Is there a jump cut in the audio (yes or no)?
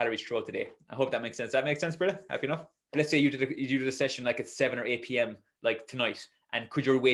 yes